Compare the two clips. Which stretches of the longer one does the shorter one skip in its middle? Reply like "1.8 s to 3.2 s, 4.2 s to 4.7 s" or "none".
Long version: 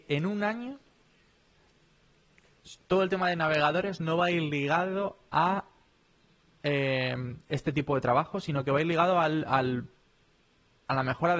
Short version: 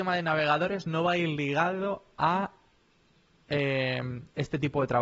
none